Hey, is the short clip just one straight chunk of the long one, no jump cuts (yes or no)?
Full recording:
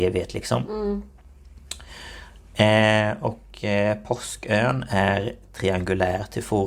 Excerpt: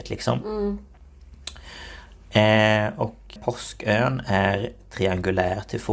no